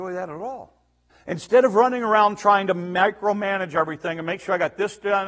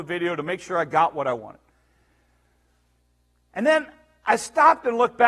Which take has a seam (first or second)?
first